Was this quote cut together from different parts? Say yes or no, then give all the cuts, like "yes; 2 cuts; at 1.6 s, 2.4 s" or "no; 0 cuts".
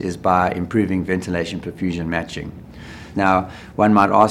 yes; 1 cut; at 3.1 s